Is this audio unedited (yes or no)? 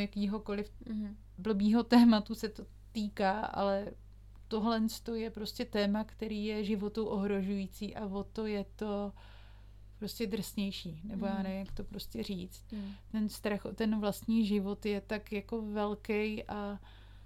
yes